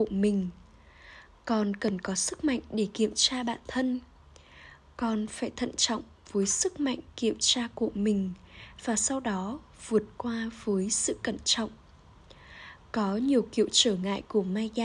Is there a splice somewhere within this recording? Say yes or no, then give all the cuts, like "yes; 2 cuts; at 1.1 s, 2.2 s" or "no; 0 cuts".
no; 0 cuts